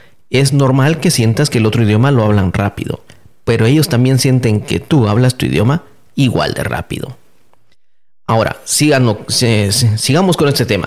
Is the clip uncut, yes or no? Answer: yes